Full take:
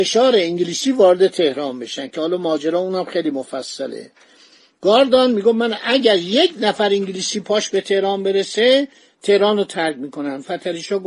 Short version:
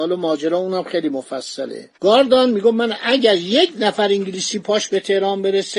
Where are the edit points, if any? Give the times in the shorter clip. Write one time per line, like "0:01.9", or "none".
0:01.9